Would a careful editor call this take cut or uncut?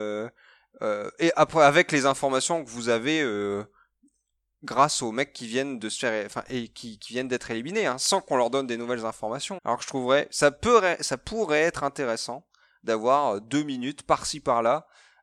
cut